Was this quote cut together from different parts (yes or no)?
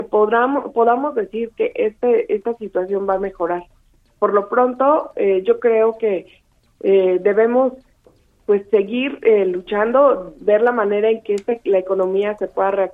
no